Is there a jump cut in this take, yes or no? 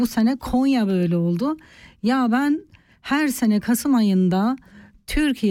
no